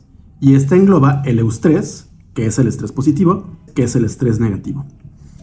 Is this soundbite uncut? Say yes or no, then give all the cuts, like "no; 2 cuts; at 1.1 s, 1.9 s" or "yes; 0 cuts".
no; 1 cut; at 3.7 s